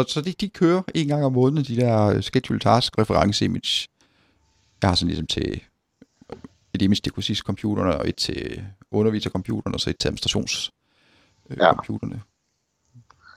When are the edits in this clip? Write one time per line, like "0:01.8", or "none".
0:02.9